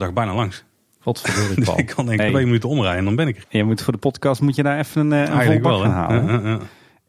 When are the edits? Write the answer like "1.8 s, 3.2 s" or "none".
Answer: none

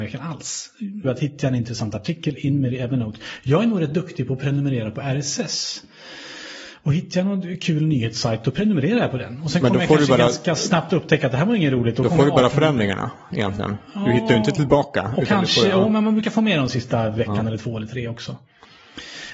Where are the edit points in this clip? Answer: 1.0 s

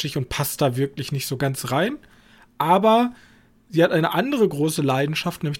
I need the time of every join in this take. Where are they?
none

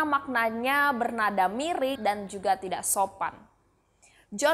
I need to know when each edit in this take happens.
2.0 s

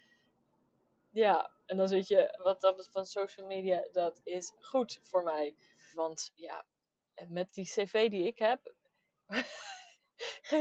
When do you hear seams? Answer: 2.4 s, 5.9 s

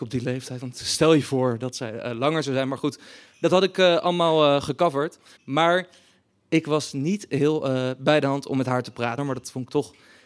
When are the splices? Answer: 5.4 s, 9.2 s

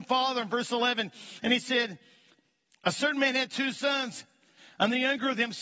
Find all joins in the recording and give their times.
none

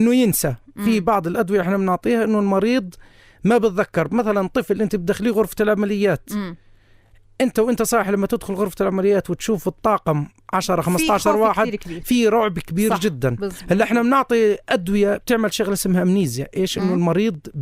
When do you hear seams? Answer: none

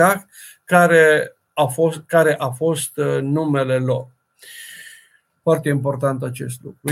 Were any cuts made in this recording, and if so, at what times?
5.4 s

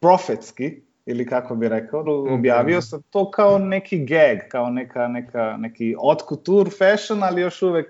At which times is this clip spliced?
2.0 s

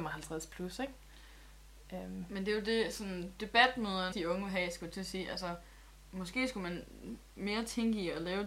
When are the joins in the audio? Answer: 4.1 s

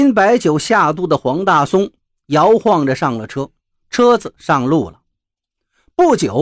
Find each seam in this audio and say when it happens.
3.7 s

